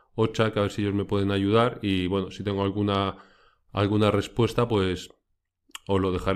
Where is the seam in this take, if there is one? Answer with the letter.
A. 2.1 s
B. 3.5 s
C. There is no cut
C